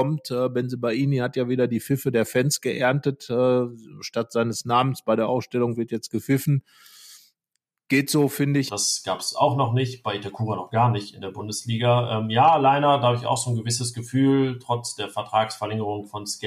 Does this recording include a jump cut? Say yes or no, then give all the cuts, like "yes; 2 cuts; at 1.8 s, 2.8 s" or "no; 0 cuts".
yes; 1 cut; at 8.7 s